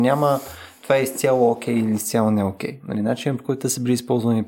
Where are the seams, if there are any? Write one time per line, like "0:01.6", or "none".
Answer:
0:02.8